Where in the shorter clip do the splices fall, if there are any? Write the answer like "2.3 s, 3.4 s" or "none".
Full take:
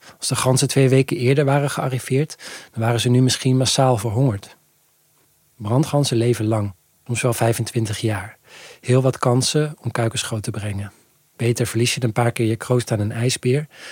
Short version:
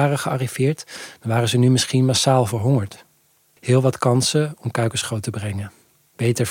3.6 s